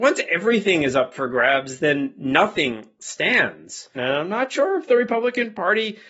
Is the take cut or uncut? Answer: cut